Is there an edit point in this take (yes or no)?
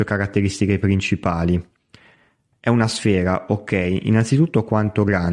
no